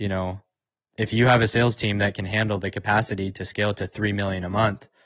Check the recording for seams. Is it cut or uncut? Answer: uncut